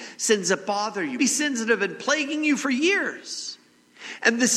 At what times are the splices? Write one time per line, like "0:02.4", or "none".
0:01.2